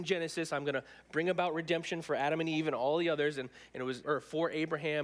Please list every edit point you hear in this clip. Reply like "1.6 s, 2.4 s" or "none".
4.0 s